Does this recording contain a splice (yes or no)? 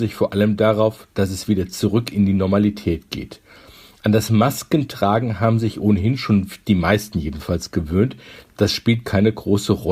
no